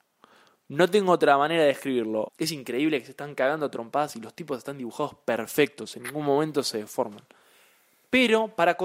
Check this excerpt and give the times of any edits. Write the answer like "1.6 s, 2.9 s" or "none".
2.3 s